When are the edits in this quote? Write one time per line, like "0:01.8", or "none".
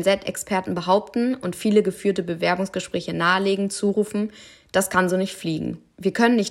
none